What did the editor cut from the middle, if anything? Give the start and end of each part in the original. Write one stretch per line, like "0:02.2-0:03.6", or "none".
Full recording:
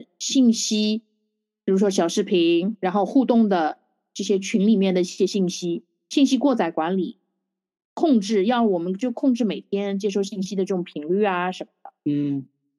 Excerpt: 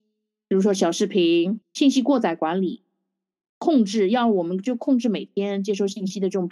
0:02.8-0:06.0